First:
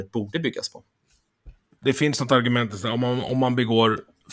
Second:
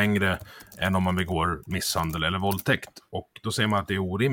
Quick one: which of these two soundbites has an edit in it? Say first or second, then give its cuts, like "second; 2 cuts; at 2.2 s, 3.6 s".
first; 1 cut; at 1.7 s